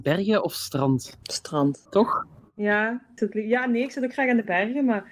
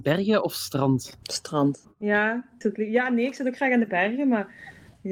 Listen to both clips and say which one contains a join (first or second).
second